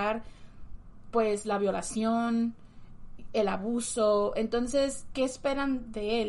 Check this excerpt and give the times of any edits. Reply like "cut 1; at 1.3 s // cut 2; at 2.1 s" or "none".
none